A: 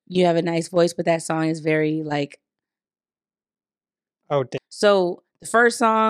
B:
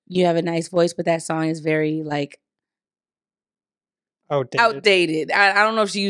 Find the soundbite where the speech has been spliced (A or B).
A